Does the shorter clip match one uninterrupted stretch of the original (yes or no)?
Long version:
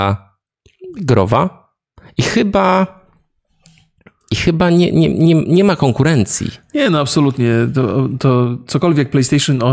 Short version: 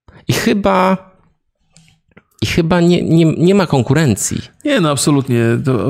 no